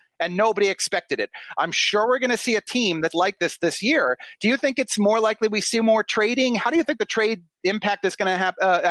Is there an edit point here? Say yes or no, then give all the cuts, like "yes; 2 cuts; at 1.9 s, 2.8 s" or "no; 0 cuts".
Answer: no; 0 cuts